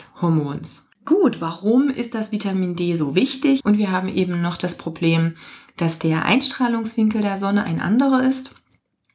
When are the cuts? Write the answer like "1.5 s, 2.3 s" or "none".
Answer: 3.6 s